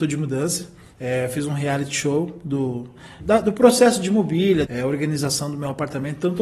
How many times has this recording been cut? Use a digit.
3